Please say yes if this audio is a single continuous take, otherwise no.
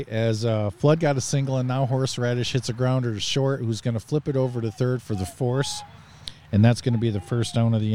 yes